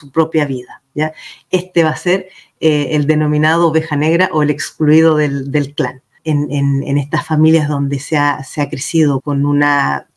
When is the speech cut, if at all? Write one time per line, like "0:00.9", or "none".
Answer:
0:06.2
0:09.2